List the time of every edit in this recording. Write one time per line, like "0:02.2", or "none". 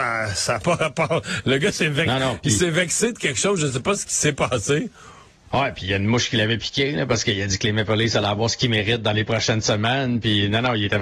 none

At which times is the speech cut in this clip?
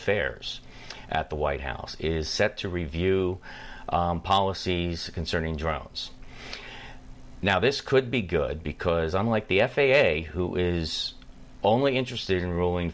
none

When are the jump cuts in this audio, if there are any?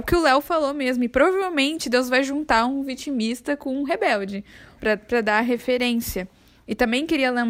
0:04.8

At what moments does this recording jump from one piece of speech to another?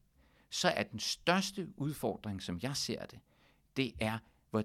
none

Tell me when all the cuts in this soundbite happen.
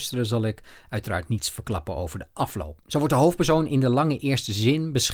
0:02.8

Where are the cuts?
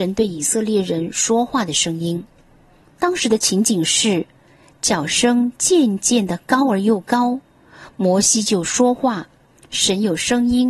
0:02.8

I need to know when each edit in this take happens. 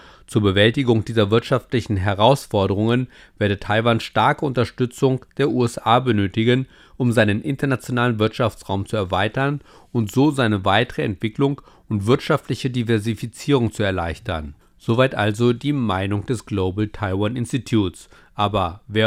none

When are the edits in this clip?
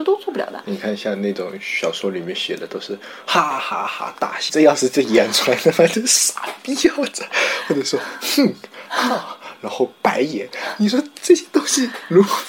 0:11.1

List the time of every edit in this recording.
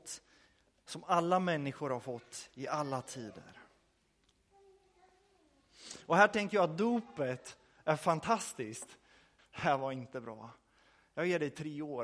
0:09.4

